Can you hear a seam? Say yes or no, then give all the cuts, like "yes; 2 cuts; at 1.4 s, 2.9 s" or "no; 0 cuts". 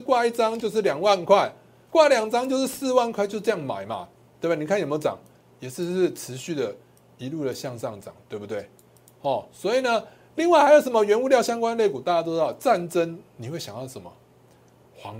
no; 0 cuts